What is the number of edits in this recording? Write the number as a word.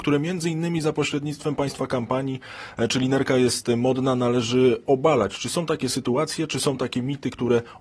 zero